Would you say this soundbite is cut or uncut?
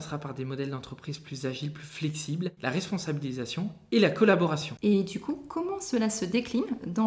cut